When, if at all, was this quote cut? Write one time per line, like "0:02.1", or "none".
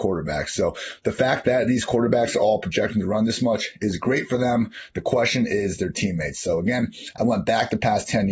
none